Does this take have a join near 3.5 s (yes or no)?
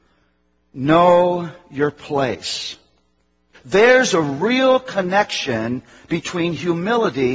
yes